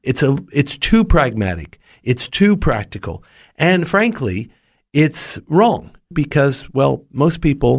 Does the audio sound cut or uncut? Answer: cut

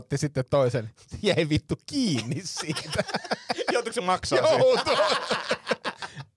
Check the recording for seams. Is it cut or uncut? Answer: uncut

